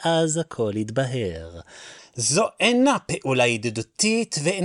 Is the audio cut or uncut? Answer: cut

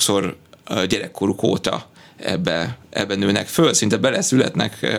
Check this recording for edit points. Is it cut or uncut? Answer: uncut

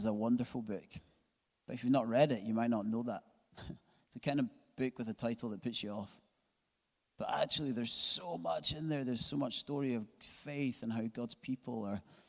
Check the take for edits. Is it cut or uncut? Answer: uncut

